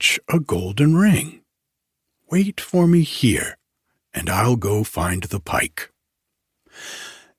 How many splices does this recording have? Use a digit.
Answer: 0